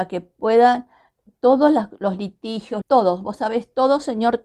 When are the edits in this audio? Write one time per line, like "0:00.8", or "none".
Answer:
0:02.8